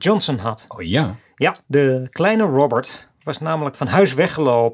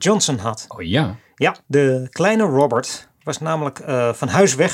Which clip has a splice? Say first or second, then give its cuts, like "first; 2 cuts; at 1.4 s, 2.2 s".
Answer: first; 1 cut; at 3.7 s